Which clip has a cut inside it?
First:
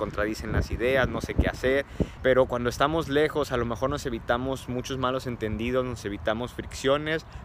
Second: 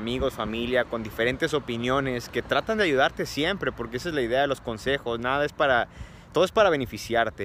first; 1 cut; at 2.2 s

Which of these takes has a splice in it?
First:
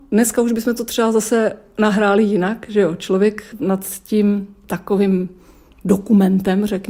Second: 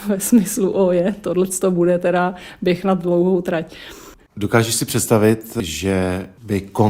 second; 1 cut; at 4.2 s

